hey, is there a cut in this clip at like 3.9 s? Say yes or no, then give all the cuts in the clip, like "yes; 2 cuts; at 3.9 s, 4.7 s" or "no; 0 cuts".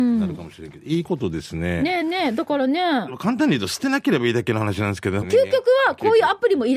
no; 2 cuts; at 2.0 s, 5.2 s